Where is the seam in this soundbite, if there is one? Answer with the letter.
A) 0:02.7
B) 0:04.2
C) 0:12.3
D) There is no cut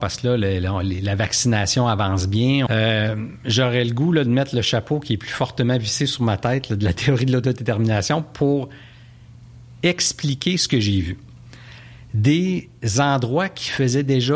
A